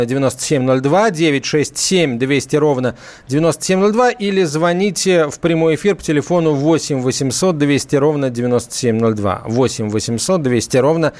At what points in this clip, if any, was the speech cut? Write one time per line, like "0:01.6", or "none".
none